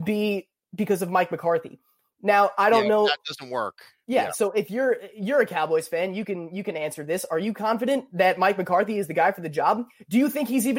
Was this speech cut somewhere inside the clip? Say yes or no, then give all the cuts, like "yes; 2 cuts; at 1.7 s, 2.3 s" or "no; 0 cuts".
no; 0 cuts